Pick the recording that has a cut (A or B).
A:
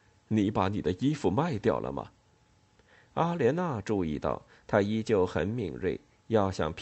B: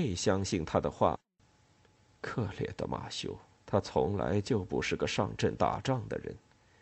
B